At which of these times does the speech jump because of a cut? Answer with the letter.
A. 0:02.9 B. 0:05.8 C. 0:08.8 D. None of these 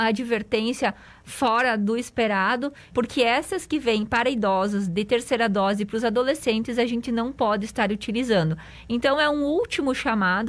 A